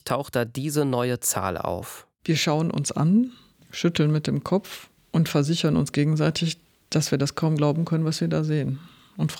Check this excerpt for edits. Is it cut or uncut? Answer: uncut